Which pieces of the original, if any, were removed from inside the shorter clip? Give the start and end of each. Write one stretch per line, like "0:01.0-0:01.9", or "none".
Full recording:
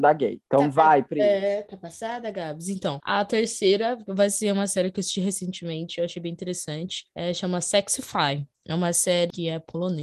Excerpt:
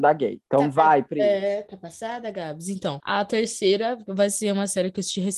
none